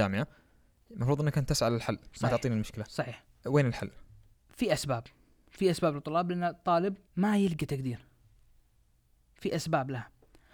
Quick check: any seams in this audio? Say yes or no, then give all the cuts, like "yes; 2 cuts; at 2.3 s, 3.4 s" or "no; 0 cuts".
yes; 2 cuts; at 4.3 s, 7.1 s